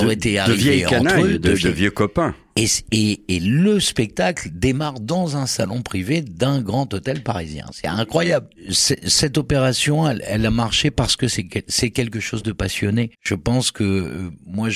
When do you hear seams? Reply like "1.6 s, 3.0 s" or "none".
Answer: 13.1 s